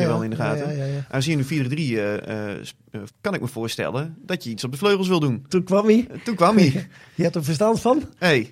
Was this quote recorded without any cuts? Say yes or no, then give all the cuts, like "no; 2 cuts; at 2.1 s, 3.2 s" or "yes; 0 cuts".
no; 2 cuts; at 3.1 s, 5.5 s